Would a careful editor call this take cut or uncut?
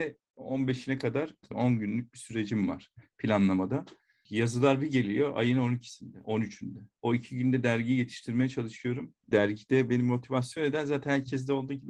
cut